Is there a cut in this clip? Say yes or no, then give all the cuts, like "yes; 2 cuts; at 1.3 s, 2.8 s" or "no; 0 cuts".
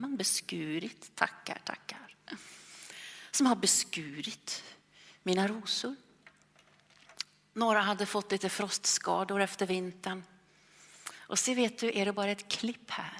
no; 0 cuts